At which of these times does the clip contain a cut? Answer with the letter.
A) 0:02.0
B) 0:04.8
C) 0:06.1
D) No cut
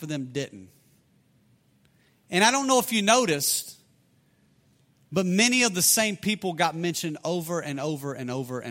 D